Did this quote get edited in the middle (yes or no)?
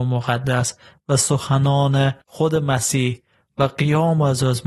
yes